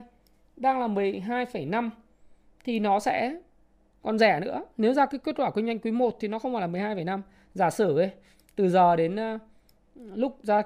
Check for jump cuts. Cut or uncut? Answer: uncut